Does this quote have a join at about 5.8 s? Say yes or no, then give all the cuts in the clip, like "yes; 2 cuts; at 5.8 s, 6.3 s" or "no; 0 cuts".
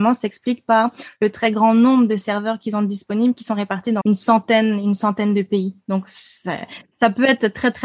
no; 1 cut; at 4.0 s